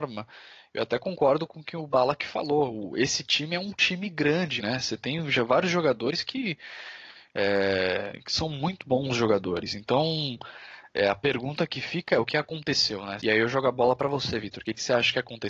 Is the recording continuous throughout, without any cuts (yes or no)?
no